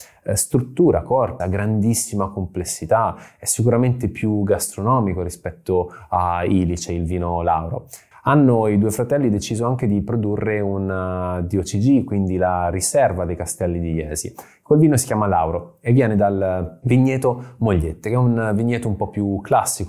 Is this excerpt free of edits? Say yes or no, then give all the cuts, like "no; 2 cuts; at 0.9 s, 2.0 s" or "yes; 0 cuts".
no; 2 cuts; at 1.4 s, 8.1 s